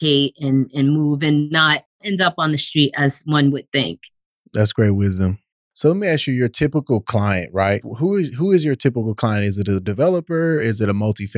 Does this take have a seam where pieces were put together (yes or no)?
yes